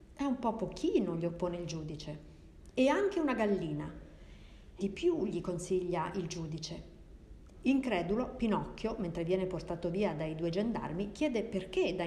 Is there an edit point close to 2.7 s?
no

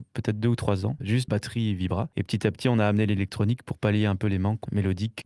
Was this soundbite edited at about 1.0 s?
yes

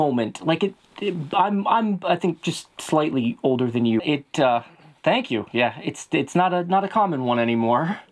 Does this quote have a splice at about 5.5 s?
no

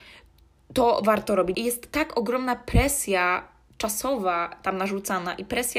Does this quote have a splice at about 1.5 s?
yes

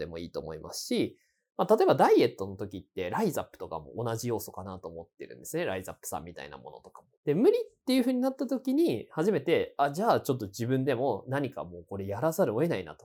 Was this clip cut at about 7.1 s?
yes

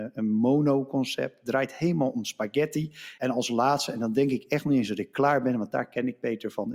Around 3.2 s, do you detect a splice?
yes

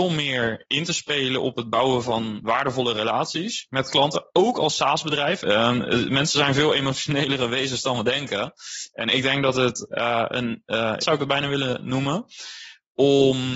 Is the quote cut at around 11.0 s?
yes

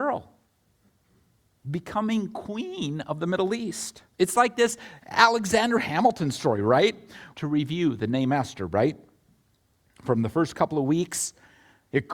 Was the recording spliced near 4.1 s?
yes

